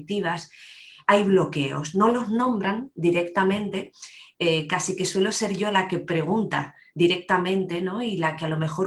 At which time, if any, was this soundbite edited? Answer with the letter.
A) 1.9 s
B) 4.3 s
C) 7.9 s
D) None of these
D